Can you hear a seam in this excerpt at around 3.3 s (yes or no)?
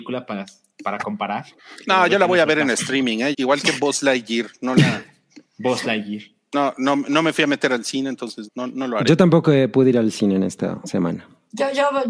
yes